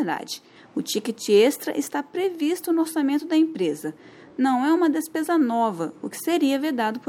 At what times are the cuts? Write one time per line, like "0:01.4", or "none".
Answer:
none